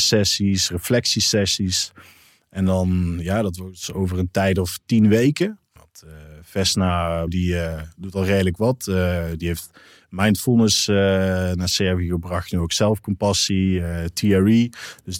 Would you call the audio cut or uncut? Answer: cut